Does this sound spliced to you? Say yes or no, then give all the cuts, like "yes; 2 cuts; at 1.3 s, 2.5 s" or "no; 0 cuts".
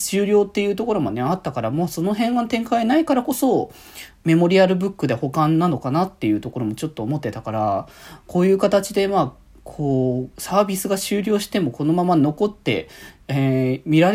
no; 0 cuts